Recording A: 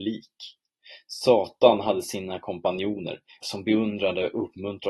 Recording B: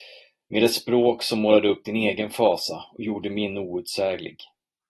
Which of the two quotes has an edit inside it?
A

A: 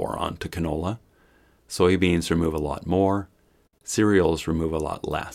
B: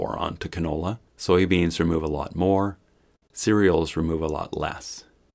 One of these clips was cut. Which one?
B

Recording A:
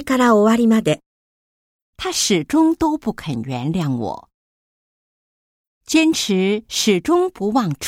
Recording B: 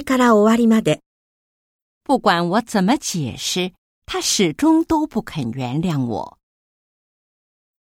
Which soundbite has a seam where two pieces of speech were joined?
A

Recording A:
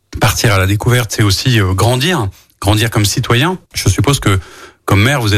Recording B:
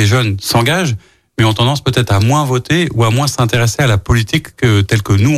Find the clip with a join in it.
A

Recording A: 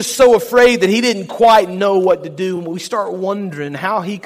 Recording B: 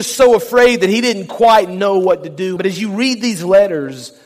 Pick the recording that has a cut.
B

